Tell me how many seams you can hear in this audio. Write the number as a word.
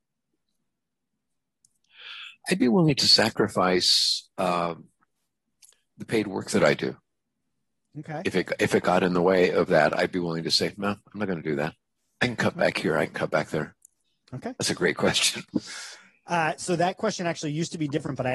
zero